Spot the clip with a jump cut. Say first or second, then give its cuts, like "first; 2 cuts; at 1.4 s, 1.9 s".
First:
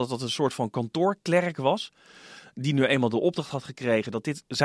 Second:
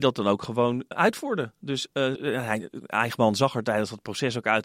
second; 2 cuts; at 0.9 s, 2.2 s